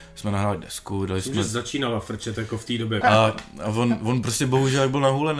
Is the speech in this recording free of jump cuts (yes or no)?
no